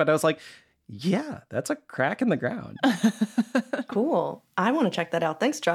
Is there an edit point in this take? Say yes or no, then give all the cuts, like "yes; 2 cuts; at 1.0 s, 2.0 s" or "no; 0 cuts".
no; 0 cuts